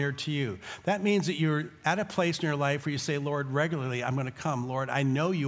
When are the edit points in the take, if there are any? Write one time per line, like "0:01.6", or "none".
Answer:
none